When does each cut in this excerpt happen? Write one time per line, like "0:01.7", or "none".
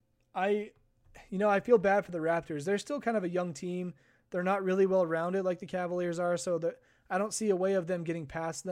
none